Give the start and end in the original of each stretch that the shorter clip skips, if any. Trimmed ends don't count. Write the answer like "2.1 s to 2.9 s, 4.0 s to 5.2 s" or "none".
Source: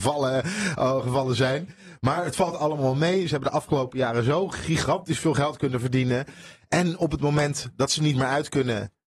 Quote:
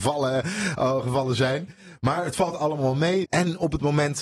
3.2 s to 6.6 s